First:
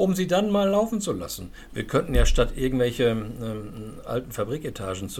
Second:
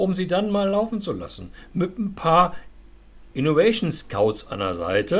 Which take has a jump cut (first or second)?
first